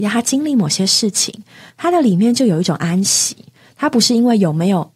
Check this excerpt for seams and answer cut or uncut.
uncut